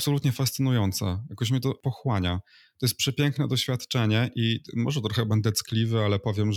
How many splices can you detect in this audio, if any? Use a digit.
0